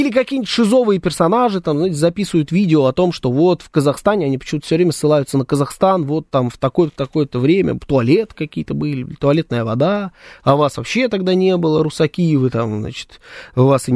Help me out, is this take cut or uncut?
uncut